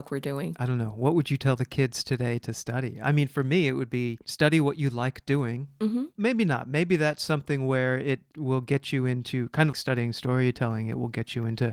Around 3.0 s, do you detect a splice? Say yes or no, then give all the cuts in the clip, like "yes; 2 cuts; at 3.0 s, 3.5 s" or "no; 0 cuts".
no; 2 cuts; at 6.2 s, 9.7 s